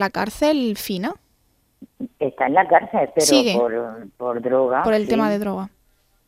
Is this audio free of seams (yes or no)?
yes